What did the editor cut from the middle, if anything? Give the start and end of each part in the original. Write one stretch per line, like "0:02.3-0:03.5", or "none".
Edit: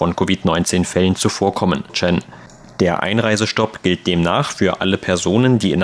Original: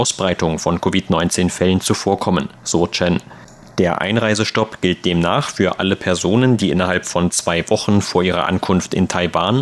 0:02.5-0:02.9